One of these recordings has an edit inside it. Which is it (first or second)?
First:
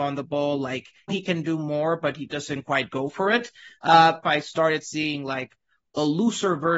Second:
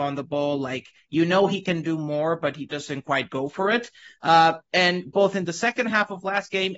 first